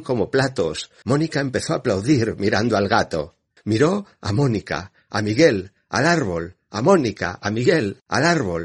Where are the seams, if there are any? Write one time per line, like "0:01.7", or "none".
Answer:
0:01.0
0:03.6